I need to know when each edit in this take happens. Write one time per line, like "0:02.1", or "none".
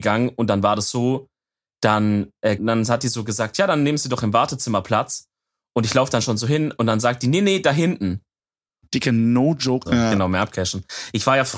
0:02.6
0:08.8
0:09.9